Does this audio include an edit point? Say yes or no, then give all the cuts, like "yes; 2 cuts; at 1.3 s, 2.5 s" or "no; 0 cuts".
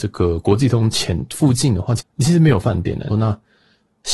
yes; 2 cuts; at 2.0 s, 3.1 s